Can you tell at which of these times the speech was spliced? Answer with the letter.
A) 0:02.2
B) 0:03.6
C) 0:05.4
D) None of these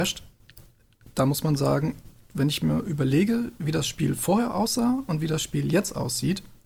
D